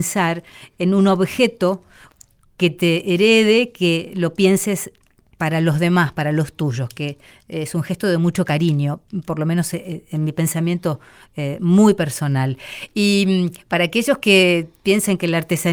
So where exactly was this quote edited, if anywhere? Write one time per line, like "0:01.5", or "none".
none